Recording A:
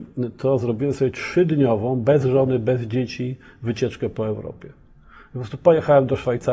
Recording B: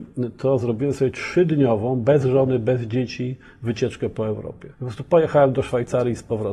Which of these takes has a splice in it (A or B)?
B